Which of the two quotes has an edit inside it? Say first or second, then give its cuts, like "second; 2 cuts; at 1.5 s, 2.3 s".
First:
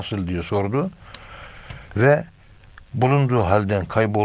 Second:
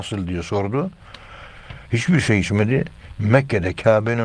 second; 1 cut; at 1.9 s